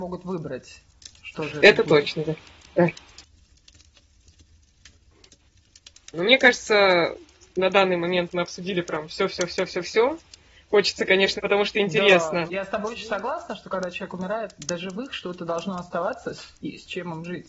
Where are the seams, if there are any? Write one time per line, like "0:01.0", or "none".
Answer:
0:11.4
0:12.5